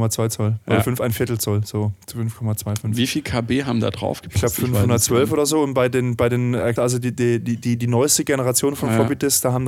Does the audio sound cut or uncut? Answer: cut